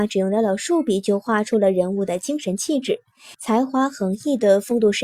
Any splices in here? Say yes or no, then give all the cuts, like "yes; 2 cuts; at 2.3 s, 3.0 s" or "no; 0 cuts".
yes; 1 cut; at 3.3 s